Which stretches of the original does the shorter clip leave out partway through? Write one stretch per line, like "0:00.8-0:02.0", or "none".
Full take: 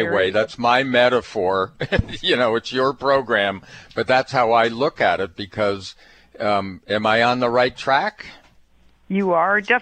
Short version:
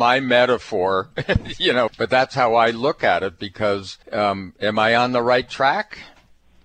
0:02.5-0:03.8
0:06.0-0:06.3